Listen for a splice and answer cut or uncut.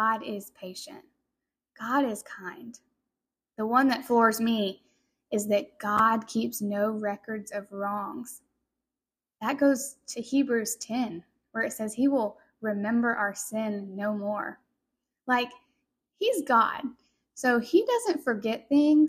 uncut